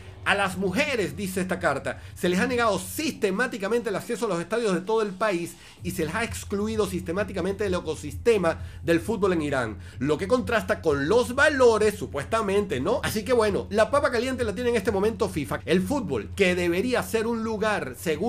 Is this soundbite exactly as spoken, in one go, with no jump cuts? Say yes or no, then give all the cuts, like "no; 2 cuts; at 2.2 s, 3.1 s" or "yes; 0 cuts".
no; 2 cuts; at 13.0 s, 15.6 s